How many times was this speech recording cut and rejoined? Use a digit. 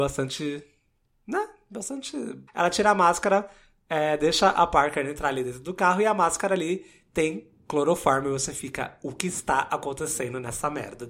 1